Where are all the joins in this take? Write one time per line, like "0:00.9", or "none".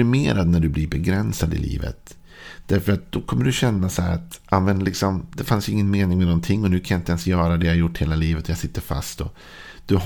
none